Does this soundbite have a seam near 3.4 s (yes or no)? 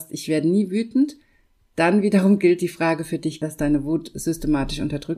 yes